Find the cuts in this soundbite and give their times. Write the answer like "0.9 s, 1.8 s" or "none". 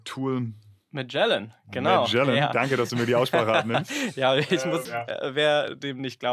4.9 s